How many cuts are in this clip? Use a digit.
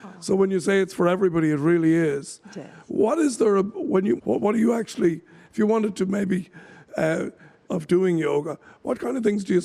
2